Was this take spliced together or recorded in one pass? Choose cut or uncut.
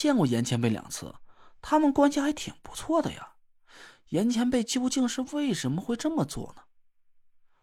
uncut